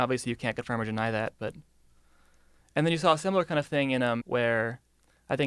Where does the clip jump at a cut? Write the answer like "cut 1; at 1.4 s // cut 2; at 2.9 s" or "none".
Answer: cut 1; at 4.2 s